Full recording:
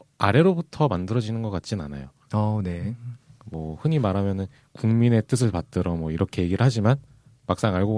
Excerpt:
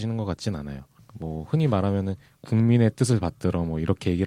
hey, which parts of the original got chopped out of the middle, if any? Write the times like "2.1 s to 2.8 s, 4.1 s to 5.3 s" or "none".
2.2 s to 3.3 s